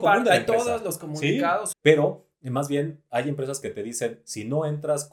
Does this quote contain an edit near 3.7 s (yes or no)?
no